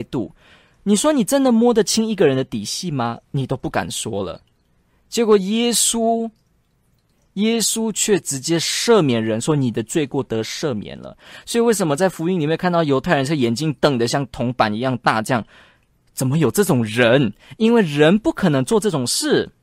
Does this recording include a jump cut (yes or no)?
no